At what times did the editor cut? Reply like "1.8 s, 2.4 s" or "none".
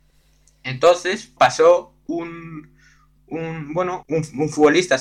1.4 s, 4.0 s